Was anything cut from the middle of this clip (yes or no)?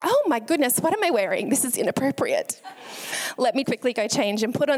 yes